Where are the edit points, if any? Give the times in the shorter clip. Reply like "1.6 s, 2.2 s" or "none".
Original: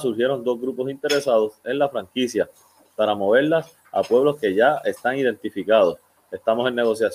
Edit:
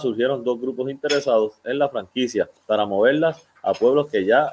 2.6 s